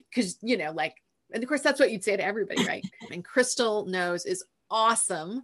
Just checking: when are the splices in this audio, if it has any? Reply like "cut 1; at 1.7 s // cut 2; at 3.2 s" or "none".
cut 1; at 3.1 s

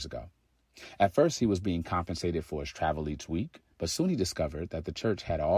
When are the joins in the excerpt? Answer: cut 1; at 3.7 s

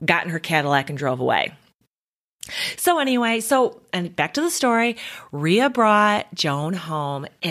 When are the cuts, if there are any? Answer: cut 1; at 2.8 s

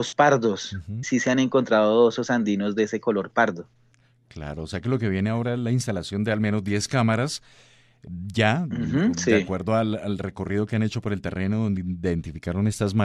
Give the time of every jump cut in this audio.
cut 1; at 1.0 s

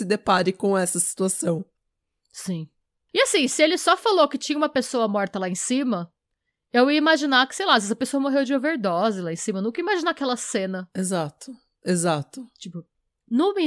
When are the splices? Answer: none

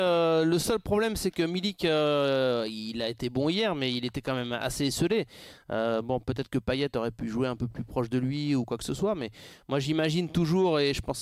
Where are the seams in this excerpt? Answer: none

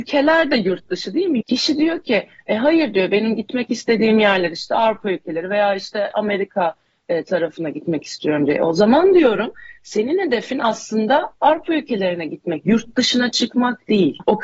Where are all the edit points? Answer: cut 1; at 1.4 s

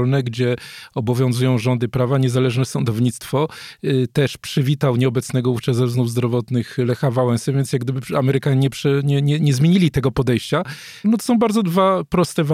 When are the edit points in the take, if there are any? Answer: cut 1; at 11.0 s

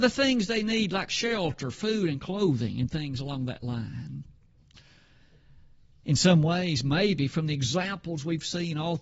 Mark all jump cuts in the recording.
none

